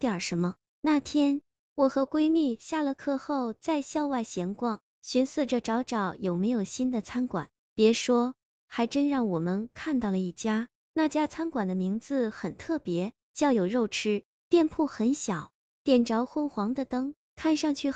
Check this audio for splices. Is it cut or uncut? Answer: uncut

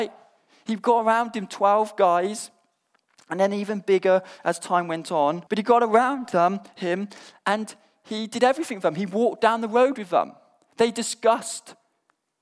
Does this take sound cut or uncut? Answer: cut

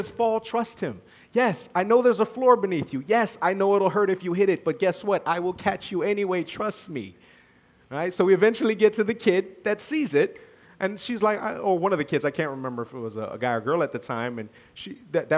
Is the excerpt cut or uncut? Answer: uncut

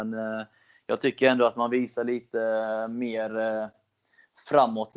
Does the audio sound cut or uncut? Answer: uncut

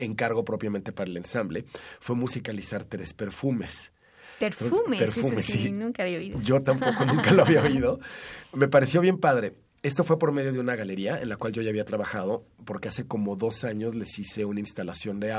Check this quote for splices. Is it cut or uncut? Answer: uncut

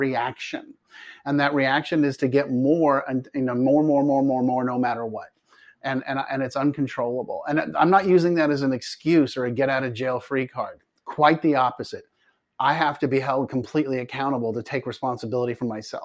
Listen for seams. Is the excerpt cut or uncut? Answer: uncut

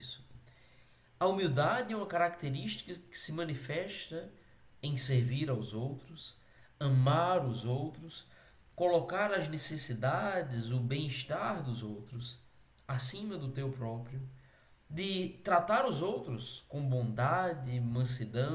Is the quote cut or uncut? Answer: uncut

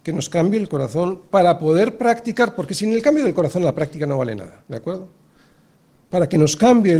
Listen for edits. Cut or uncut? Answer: uncut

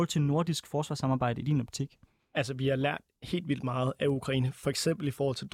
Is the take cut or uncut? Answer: uncut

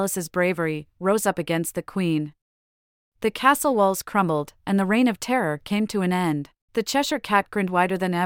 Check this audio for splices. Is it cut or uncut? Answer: cut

